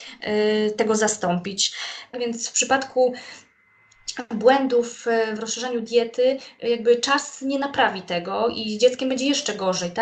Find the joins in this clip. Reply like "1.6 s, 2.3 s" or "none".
2.1 s, 5.4 s